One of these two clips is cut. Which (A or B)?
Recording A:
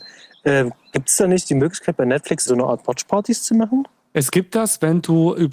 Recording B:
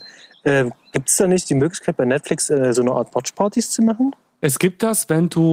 A